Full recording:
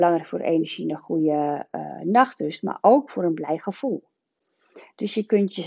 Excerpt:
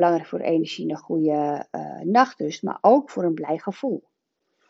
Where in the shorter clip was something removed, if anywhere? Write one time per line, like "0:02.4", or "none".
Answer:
none